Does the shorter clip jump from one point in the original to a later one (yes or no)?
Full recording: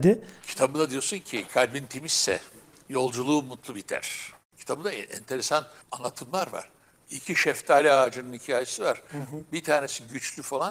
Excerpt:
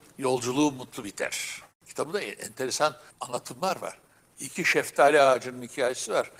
no